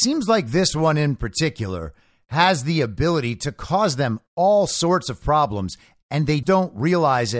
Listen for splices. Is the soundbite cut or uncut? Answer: cut